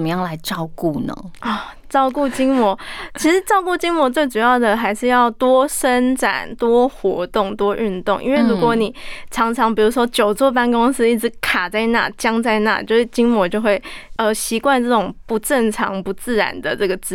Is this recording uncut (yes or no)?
yes